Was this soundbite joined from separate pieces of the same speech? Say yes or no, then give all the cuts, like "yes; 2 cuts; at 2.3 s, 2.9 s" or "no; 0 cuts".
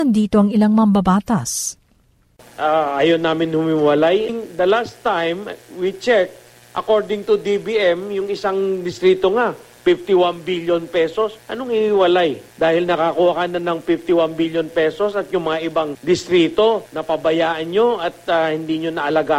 no; 0 cuts